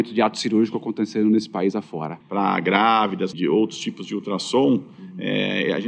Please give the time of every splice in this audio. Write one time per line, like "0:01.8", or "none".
0:02.2
0:03.3